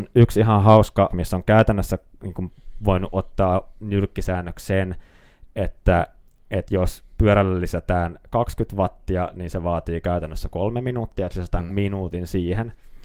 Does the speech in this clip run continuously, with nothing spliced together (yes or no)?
no